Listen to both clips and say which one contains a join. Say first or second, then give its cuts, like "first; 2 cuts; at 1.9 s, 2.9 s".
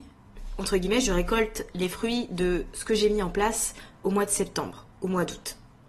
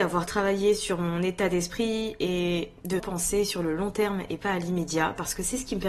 second; 1 cut; at 3.0 s